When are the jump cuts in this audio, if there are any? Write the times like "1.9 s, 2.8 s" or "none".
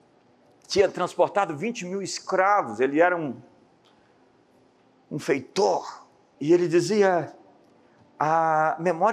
6.3 s